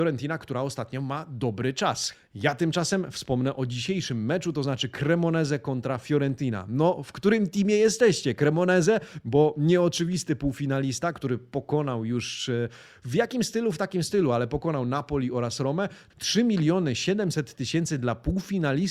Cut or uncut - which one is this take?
cut